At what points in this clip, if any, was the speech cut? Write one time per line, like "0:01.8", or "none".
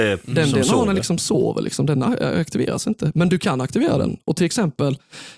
none